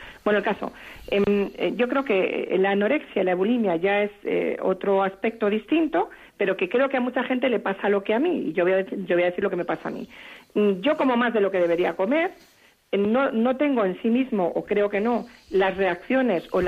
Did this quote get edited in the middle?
no; 0 cuts

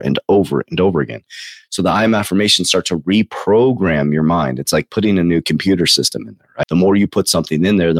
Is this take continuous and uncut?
no; 1 cut; at 6.6 s

